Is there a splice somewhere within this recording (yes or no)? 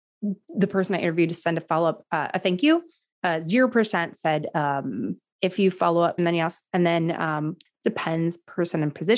yes